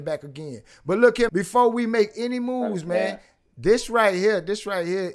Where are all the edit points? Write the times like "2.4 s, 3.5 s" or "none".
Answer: 1.3 s